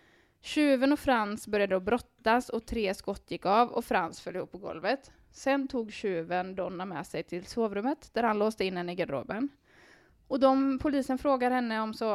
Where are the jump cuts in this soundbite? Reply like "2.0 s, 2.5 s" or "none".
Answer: 10.1 s